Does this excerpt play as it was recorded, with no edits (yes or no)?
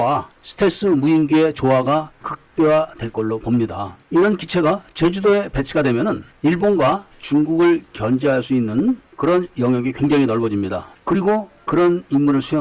yes